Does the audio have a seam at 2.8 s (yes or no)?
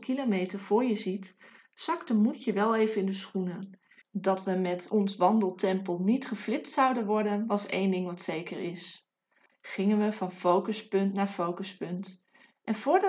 no